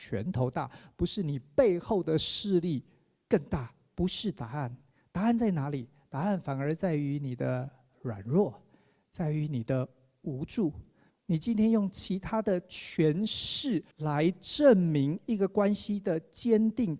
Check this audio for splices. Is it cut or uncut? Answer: cut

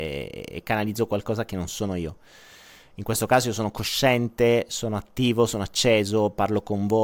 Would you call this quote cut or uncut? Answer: uncut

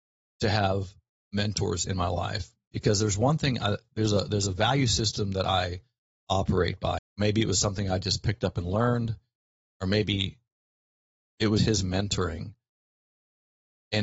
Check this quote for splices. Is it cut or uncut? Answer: cut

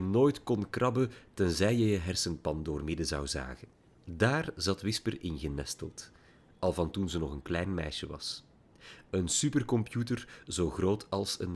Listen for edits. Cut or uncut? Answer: uncut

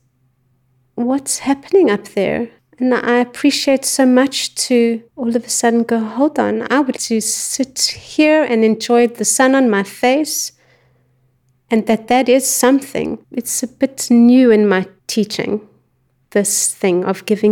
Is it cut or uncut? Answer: cut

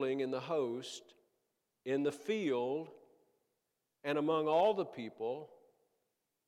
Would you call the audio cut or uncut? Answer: uncut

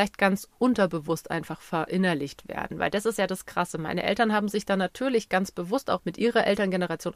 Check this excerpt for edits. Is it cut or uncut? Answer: cut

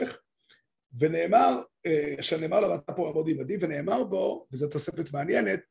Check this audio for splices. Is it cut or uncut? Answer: uncut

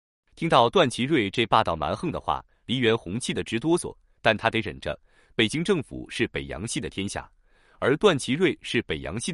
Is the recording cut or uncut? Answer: uncut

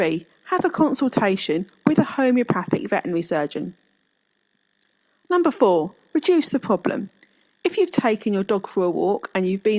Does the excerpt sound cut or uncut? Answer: uncut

